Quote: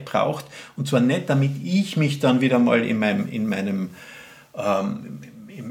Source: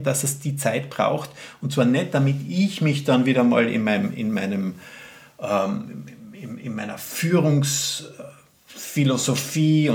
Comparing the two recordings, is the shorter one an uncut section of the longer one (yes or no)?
yes